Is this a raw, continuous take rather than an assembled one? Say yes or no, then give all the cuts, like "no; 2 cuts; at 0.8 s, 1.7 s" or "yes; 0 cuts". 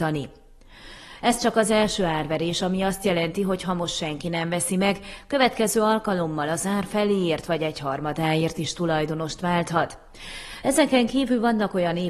no; 2 cuts; at 1.2 s, 10.6 s